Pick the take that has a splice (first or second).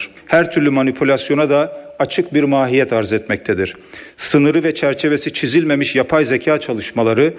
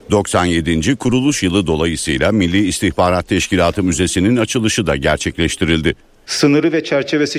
second